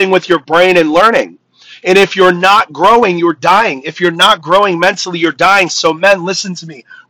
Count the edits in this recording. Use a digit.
0